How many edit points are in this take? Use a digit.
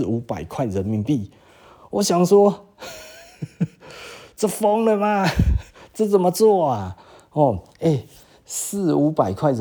0